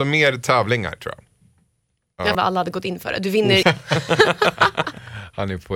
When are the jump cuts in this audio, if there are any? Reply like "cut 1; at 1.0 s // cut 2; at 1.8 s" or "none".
cut 1; at 2.3 s // cut 2; at 3.6 s